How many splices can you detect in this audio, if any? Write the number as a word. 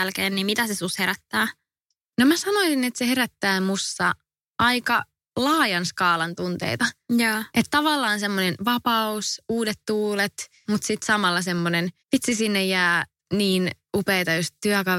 two